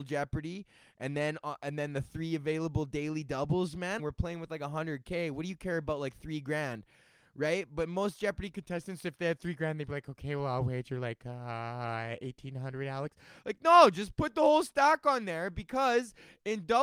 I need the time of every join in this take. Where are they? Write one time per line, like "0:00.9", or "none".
0:04.0